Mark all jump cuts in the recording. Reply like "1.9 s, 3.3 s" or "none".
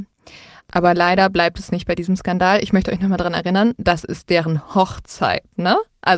none